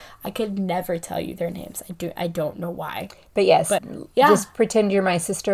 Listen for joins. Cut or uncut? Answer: cut